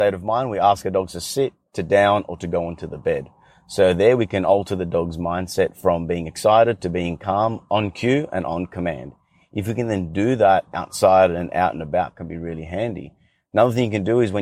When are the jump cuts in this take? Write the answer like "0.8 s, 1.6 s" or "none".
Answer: none

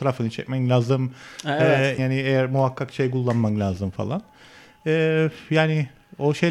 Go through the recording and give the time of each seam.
2.0 s

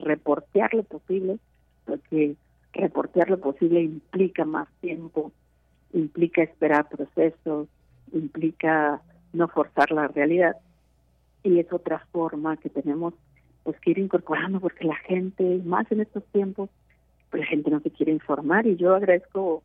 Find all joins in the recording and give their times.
none

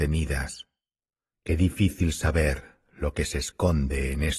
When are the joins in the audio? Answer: 1.3 s

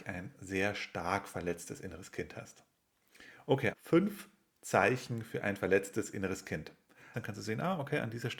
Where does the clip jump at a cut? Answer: 3.7 s, 7.1 s

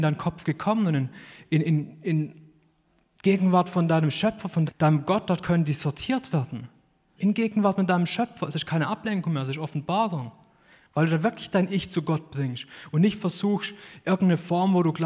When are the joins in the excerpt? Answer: 4.7 s, 7.2 s

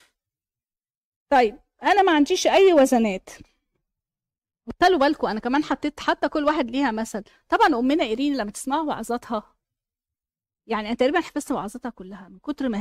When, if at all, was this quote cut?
none

